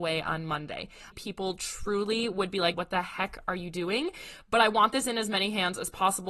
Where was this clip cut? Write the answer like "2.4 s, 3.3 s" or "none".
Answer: 1.1 s, 2.7 s